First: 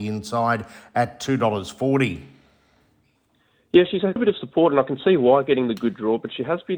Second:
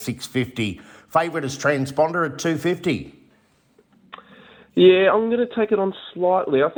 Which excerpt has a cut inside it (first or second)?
first